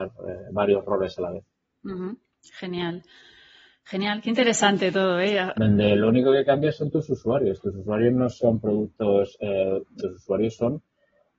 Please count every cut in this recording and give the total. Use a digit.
2